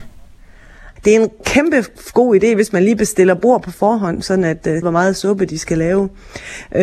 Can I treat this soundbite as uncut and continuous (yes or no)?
no